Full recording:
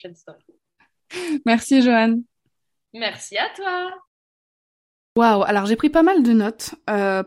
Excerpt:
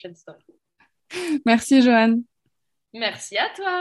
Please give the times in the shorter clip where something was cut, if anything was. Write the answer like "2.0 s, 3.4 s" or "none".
none

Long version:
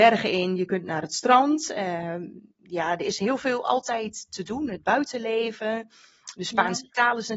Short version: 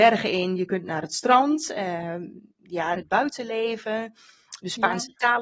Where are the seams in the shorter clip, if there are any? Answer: 2.9 s

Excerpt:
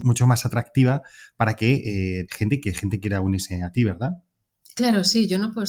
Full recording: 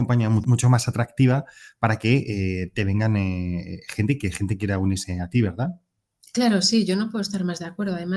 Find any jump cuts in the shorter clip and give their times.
2.3 s

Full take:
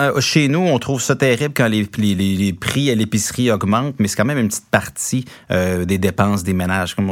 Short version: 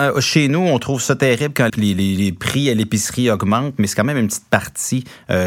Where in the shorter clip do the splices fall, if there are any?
1.7 s

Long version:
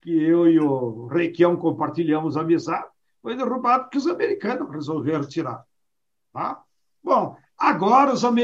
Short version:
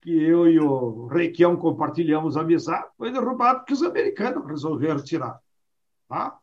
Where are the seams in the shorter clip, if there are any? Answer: 2.9 s

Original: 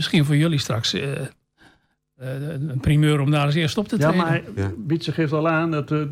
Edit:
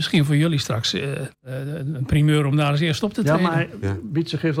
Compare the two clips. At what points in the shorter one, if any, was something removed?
1.3 s

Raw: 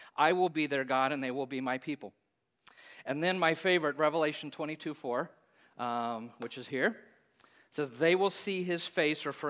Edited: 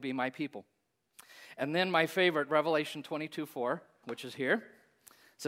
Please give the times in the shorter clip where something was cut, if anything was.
4.0 s

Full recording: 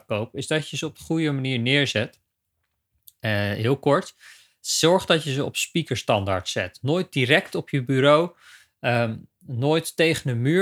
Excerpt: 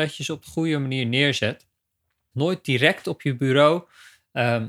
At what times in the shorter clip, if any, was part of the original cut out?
2.3 s

